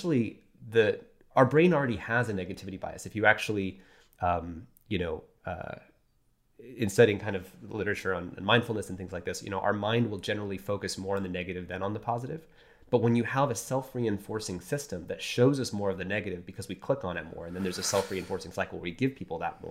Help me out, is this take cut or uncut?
uncut